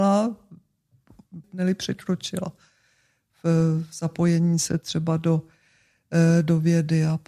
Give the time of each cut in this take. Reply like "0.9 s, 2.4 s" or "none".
1.4 s